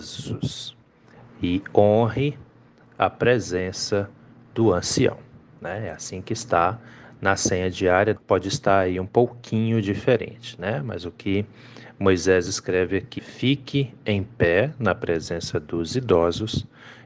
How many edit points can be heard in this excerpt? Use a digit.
2